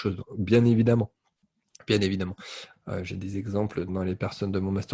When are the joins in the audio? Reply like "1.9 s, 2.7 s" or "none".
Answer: 2.7 s, 3.9 s